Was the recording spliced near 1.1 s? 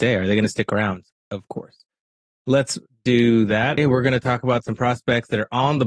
yes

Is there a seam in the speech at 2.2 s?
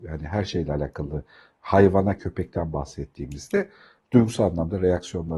yes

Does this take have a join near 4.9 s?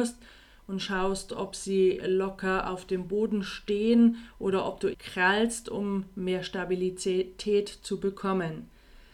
yes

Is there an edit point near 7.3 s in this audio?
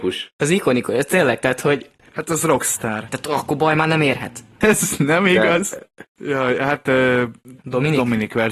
no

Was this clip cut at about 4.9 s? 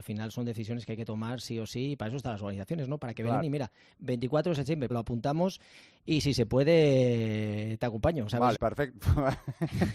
yes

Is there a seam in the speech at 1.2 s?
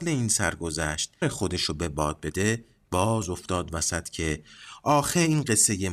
yes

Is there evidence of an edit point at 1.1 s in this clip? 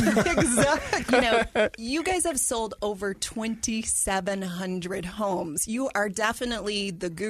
yes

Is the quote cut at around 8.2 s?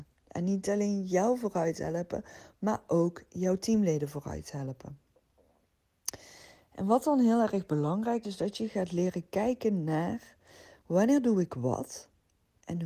yes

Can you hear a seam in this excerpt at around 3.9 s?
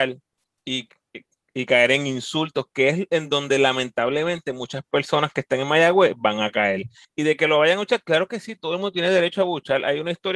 no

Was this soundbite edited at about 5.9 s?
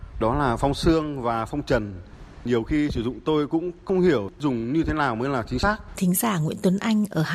yes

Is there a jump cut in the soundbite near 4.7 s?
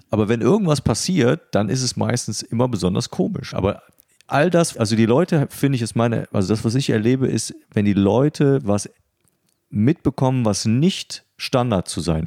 yes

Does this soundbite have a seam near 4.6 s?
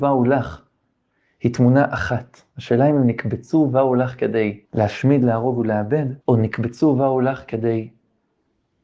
yes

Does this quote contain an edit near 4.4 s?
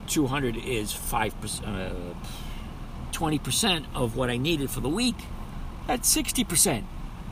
no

